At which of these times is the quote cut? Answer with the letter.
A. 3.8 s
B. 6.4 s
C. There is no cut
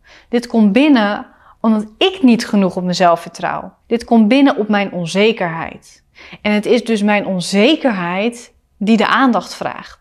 A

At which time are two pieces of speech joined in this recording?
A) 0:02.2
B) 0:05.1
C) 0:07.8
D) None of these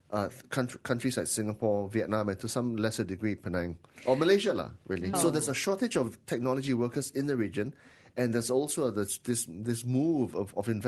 B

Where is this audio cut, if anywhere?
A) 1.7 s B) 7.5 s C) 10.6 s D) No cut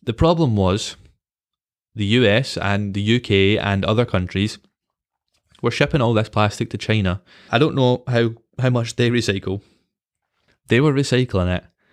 B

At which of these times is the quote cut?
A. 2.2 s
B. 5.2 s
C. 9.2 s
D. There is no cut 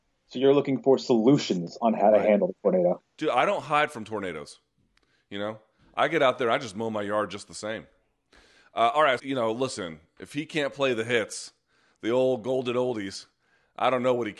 C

